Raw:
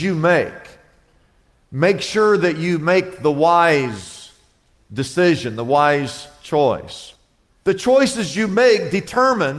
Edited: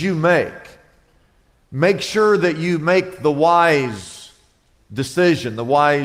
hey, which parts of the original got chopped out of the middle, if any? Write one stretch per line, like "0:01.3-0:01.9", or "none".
none

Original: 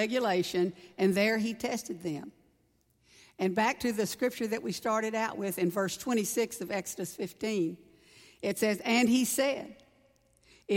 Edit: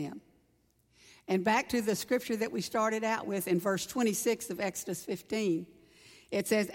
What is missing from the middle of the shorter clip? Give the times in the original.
none

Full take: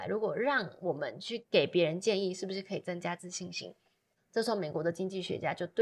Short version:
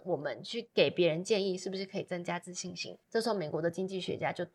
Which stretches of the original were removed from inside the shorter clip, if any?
0:03.8-0:04.2

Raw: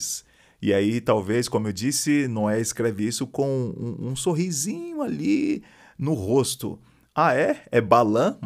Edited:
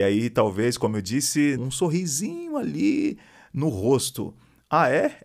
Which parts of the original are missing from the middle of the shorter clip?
0:02.3-0:04.0

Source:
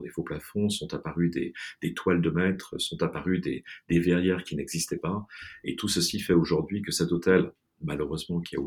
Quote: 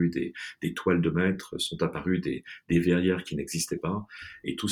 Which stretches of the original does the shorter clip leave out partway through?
none

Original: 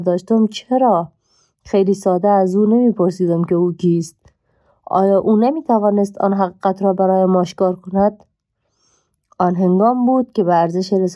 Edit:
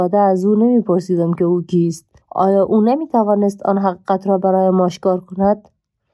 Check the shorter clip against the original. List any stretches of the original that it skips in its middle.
0:04.3-0:04.8

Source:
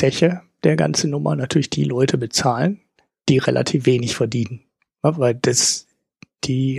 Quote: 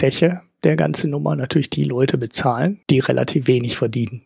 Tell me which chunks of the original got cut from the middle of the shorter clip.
0:02.8-0:03.2

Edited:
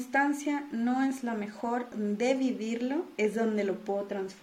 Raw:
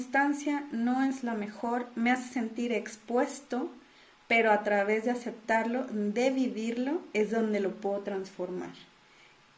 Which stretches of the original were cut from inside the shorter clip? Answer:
0:01.9-0:05.9

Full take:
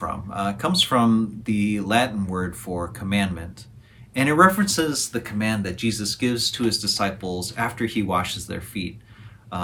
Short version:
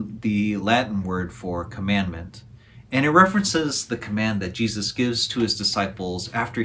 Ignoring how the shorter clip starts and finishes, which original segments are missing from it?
none

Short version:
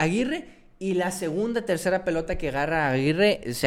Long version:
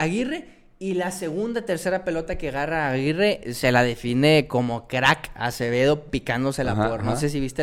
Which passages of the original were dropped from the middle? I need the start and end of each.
none

